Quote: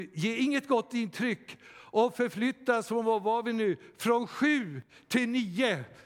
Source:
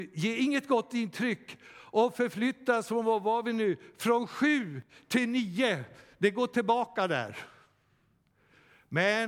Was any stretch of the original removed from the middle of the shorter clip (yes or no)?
no